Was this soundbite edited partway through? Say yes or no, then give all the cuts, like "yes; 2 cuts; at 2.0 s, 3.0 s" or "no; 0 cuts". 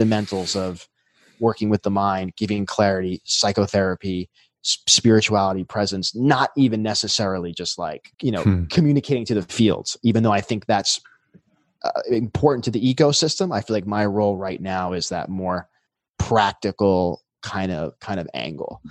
yes; 1 cut; at 8.1 s